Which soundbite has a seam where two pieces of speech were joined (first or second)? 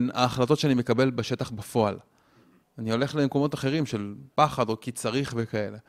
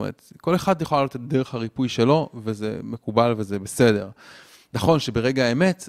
first